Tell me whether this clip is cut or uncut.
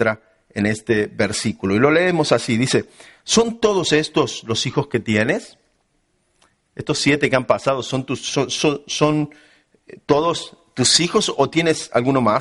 uncut